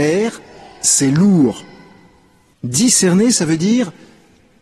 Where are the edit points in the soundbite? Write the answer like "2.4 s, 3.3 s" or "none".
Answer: 2.5 s

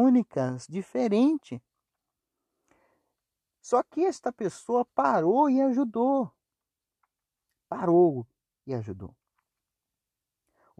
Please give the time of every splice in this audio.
none

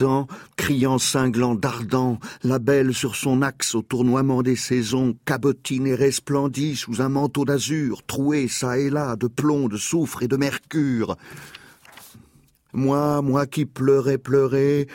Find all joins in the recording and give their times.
12.1 s

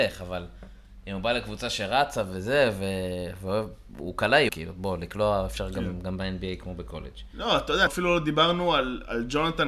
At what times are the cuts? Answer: 4.5 s, 7.9 s

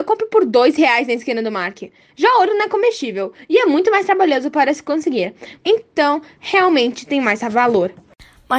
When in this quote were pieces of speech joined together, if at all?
5.6 s

